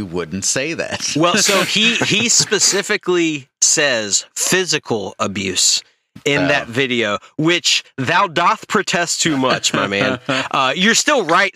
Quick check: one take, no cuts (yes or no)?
yes